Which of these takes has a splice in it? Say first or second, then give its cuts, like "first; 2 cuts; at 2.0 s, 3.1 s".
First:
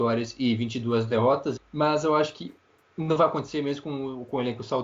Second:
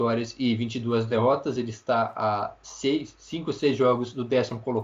first; 1 cut; at 1.6 s